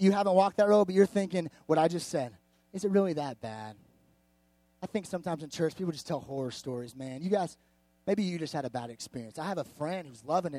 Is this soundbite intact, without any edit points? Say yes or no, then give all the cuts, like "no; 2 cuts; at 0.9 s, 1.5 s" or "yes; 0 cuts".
yes; 0 cuts